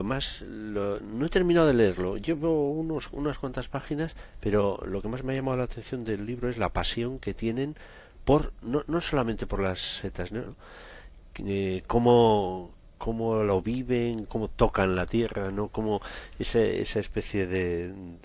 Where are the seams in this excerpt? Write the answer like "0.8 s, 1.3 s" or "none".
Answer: 10.5 s, 14.3 s